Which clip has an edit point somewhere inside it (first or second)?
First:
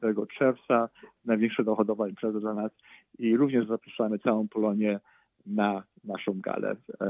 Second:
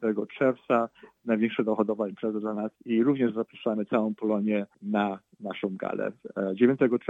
second